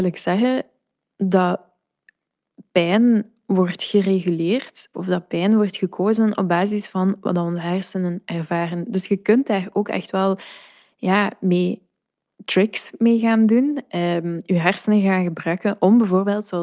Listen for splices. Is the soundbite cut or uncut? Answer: cut